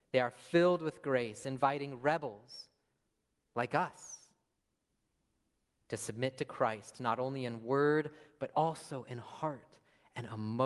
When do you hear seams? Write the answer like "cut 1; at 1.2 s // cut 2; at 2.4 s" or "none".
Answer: none